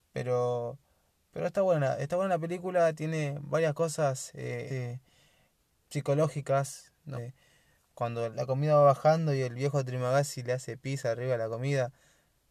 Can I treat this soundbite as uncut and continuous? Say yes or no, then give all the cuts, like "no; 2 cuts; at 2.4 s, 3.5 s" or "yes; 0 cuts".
no; 3 cuts; at 4.7 s, 7.1 s, 8.3 s